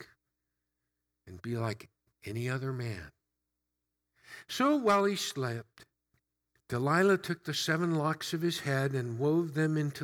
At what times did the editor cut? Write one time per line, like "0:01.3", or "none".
none